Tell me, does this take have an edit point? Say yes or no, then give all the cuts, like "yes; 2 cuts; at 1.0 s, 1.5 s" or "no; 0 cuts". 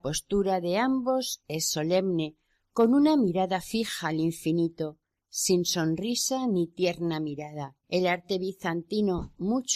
yes; 1 cut; at 7.8 s